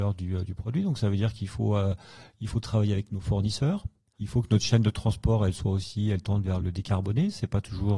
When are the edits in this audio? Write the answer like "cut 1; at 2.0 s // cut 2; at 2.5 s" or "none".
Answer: cut 1; at 4.1 s // cut 2; at 6.6 s